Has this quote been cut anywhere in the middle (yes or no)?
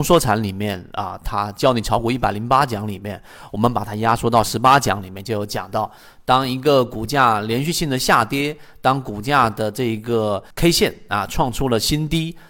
yes